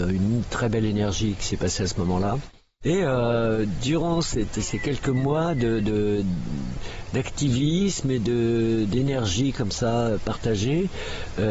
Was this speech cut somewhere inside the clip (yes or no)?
no